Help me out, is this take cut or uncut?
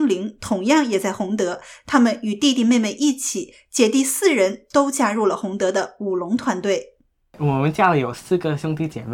uncut